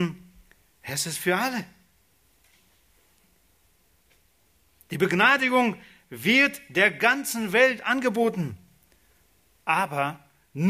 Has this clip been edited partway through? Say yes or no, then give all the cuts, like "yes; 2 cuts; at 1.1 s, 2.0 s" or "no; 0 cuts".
no; 0 cuts